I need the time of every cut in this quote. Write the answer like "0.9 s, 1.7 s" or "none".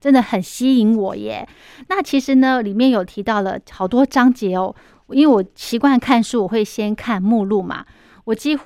none